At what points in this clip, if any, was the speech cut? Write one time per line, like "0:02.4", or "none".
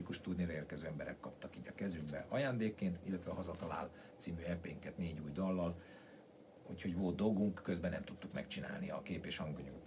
none